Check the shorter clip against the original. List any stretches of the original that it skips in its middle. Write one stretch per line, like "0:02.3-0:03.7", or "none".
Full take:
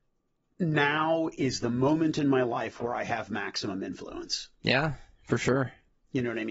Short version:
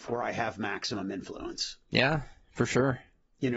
none